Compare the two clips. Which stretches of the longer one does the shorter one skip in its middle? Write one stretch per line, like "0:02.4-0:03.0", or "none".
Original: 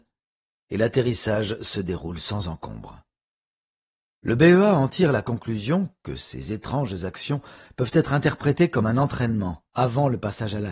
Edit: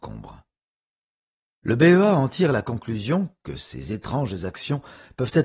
none

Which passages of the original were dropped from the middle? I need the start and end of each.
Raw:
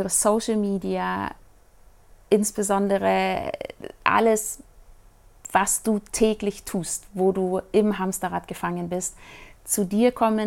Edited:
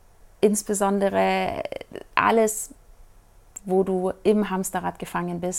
0:05.5-0:07.1

